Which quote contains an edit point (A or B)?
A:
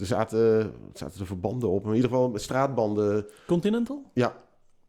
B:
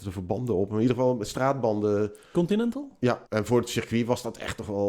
B